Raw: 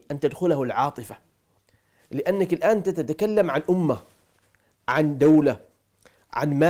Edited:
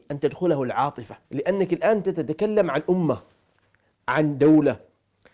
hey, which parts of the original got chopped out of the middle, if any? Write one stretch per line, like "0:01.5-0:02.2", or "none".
0:01.2-0:02.0